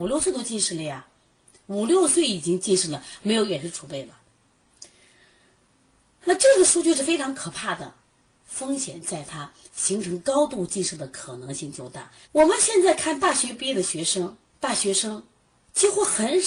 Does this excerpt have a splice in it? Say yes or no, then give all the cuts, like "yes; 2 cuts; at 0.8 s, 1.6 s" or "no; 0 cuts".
yes; 2 cuts; at 8.4 s, 12.2 s